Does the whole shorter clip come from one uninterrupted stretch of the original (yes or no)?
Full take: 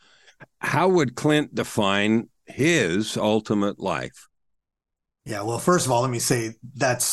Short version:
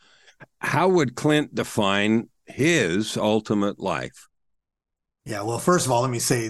yes